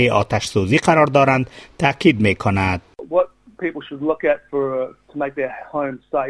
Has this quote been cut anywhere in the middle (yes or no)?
no